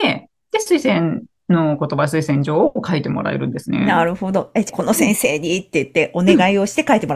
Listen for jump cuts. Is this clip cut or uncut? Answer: cut